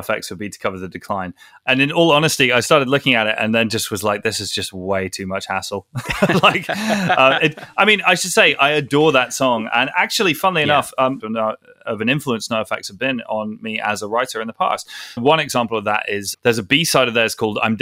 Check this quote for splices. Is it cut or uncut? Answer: cut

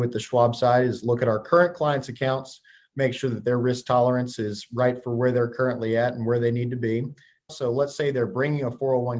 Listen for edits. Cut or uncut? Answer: cut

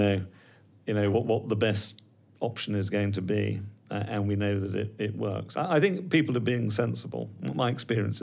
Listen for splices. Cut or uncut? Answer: uncut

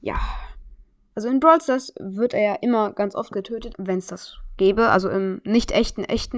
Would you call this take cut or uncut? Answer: cut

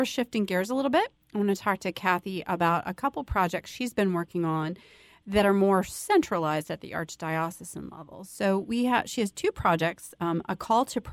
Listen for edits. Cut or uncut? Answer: uncut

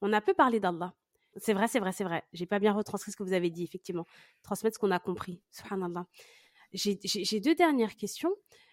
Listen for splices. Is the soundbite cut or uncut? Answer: cut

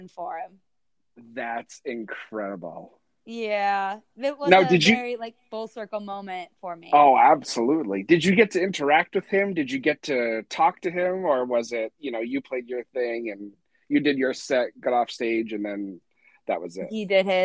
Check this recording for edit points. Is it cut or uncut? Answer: uncut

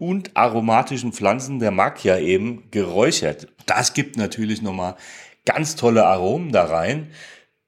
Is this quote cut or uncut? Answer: uncut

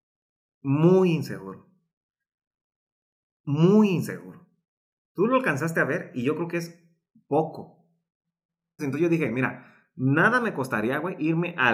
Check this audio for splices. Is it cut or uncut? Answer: cut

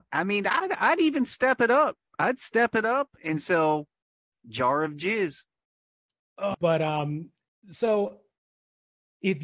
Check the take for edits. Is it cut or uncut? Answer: cut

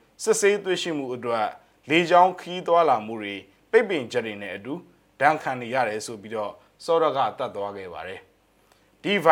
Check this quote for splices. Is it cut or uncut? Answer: cut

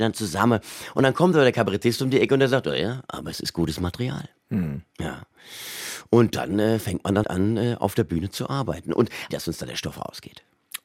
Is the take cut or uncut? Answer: cut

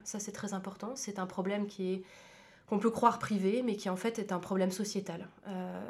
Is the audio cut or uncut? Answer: uncut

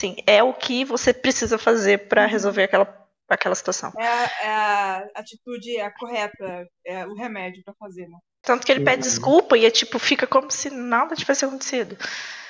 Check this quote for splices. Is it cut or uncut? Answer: cut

